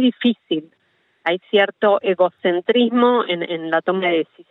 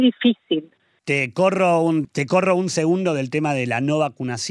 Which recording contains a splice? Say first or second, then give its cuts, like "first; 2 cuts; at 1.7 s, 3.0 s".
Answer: second; 2 cuts; at 1.0 s, 2.0 s